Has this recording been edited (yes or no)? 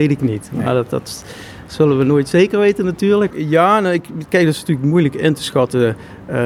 yes